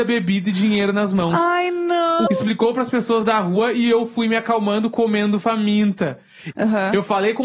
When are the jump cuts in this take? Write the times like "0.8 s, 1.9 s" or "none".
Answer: 2.3 s, 6.5 s